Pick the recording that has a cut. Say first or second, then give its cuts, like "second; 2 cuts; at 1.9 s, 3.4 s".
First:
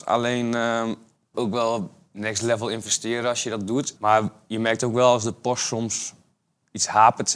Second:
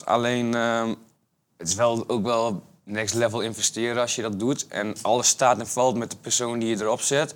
first; 2 cuts; at 1.3 s, 4.0 s